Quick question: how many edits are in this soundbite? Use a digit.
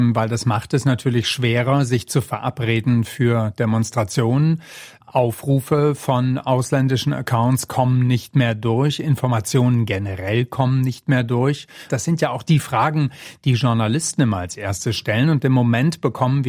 1